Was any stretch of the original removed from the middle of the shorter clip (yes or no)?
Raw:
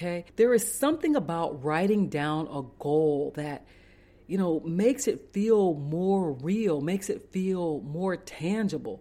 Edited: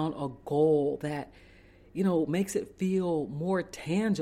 yes